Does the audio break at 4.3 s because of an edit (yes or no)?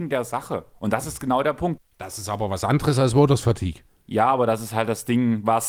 no